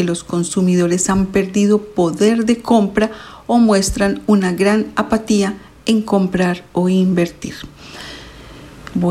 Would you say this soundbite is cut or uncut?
uncut